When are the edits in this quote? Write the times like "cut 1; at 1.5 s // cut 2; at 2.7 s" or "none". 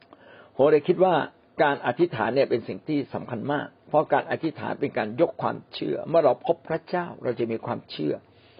cut 1; at 3.8 s